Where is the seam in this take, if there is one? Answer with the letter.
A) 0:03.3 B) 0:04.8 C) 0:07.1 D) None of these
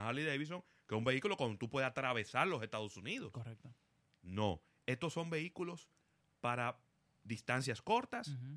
D